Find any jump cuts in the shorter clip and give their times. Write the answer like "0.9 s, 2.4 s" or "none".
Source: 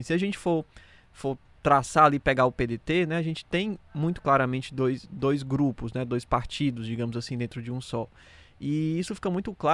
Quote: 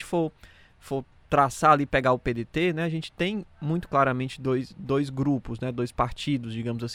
none